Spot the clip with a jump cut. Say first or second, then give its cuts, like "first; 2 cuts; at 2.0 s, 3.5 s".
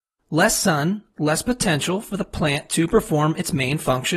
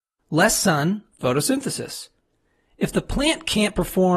second; 1 cut; at 1.1 s